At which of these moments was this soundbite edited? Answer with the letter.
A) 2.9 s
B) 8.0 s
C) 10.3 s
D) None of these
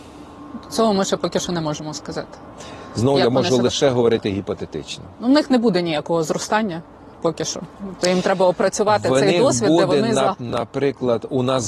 C